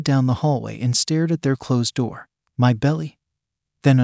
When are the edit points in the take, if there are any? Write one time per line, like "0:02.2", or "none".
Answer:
0:02.5